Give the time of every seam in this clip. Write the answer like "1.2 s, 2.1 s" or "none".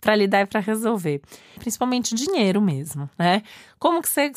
1.6 s